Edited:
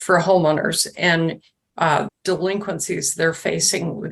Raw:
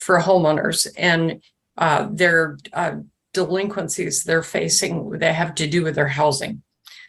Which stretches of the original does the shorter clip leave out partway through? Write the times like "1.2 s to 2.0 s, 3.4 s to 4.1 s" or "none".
2.1 s to 3.2 s